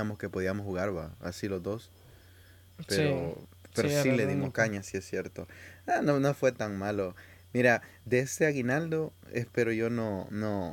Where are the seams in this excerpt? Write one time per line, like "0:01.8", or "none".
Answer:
none